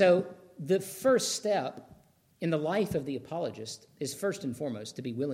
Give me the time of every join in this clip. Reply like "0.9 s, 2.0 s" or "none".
none